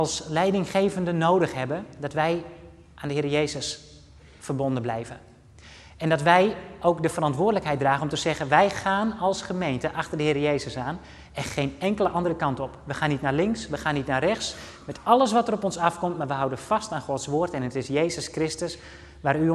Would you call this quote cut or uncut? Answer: uncut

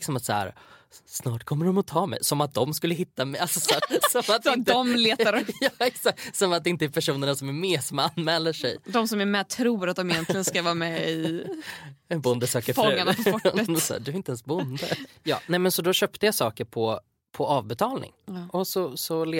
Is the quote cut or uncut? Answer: cut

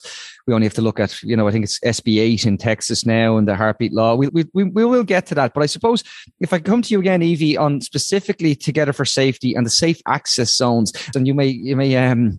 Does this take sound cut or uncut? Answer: cut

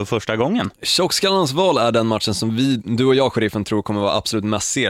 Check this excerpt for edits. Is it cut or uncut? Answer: cut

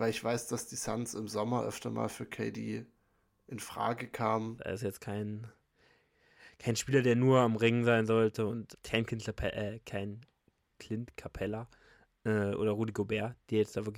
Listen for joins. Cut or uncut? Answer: cut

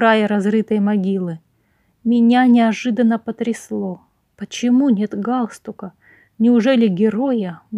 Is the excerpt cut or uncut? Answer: uncut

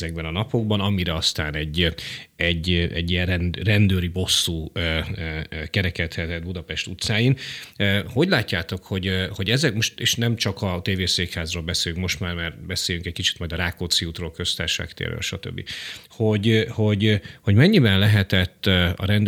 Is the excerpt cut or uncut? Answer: uncut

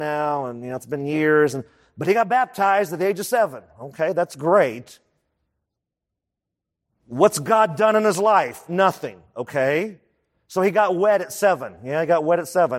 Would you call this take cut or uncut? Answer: uncut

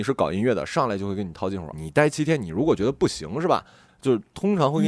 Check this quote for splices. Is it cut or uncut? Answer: cut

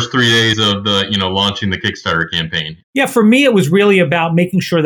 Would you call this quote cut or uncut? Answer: cut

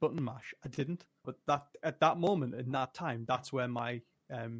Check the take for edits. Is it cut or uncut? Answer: cut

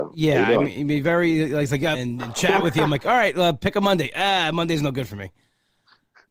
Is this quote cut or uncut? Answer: cut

